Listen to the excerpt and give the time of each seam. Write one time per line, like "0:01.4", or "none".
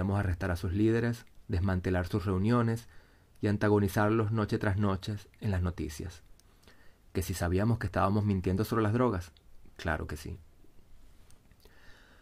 0:01.4